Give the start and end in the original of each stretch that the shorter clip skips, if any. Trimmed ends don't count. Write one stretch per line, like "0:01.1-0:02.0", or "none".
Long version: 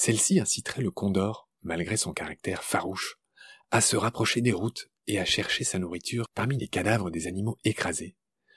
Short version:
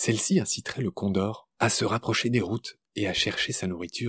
0:01.5-0:03.7